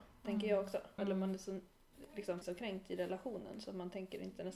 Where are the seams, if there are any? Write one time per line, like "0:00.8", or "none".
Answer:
0:01.0
0:02.4

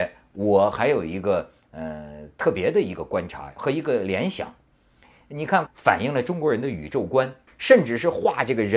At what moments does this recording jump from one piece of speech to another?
0:05.7
0:07.5

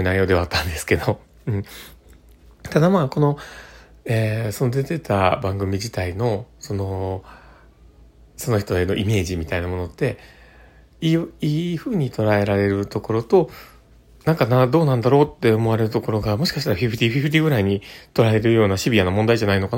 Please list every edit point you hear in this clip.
none

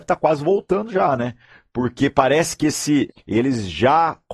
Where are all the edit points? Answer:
0:03.1

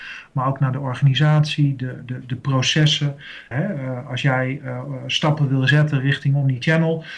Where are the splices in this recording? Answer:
0:03.5

